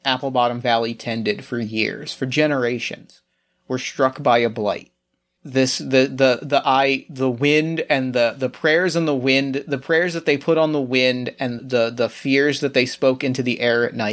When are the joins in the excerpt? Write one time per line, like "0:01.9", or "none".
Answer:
0:11.6